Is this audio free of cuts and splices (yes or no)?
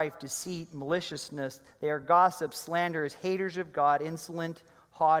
yes